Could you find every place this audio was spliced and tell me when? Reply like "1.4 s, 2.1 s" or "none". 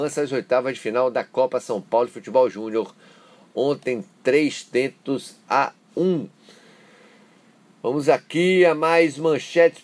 none